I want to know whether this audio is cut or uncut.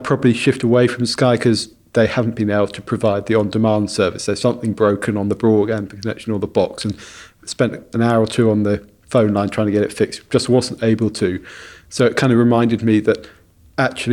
cut